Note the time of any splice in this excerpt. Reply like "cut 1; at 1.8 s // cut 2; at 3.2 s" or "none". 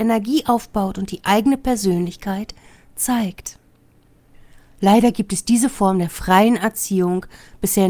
none